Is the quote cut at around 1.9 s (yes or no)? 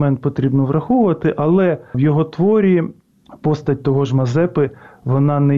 yes